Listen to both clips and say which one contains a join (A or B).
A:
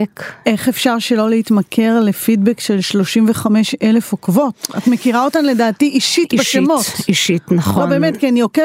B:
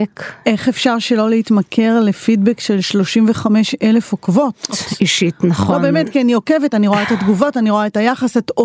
B